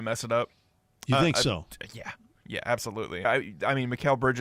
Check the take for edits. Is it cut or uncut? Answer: cut